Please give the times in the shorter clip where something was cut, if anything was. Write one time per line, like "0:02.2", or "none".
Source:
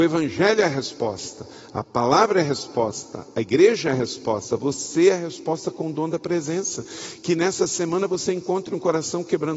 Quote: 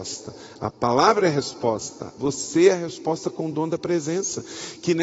0:02.2